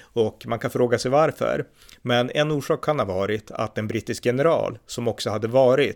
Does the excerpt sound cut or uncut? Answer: uncut